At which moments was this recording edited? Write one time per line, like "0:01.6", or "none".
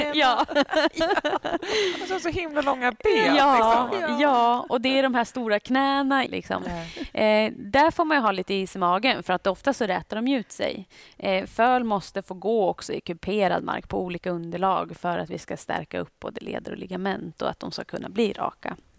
0:06.3